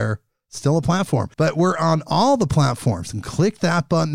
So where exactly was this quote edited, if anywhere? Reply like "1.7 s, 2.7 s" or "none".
1.3 s